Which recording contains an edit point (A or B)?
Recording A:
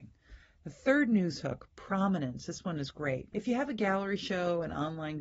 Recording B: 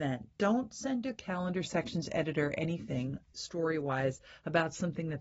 A